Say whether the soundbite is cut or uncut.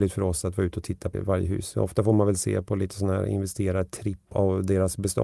cut